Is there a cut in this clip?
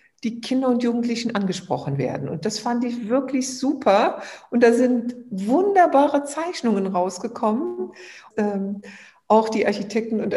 yes; 1 cut; at 8.3 s

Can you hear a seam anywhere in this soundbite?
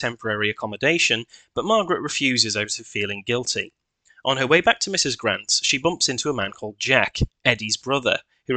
no; 0 cuts

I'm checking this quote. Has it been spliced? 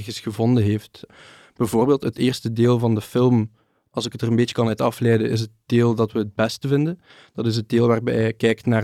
no; 0 cuts

